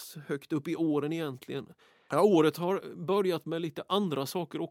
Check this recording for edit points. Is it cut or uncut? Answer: cut